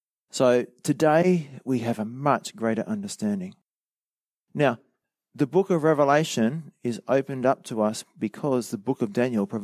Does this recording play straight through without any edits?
yes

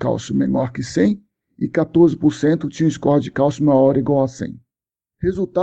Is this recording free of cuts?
yes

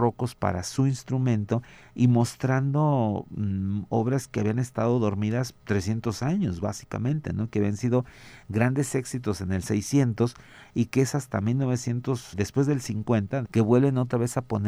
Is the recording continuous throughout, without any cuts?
no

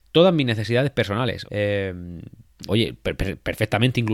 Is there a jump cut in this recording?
yes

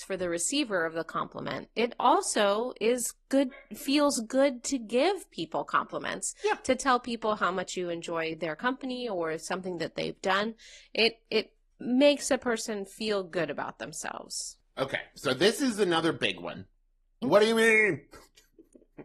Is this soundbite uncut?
no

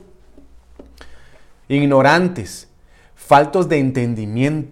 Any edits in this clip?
yes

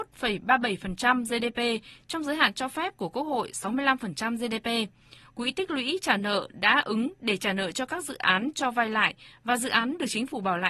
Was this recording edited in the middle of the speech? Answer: no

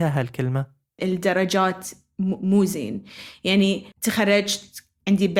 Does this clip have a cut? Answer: yes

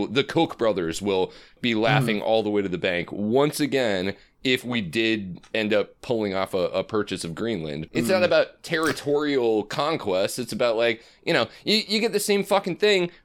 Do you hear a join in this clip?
no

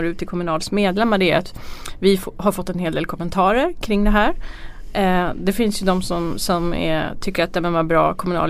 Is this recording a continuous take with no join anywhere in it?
yes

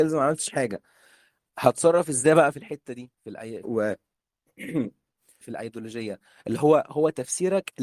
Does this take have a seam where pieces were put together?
yes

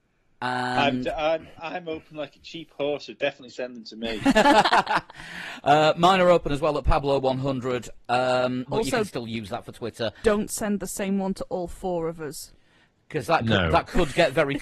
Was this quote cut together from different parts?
yes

